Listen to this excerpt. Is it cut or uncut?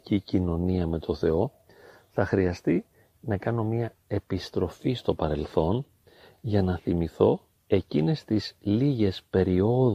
uncut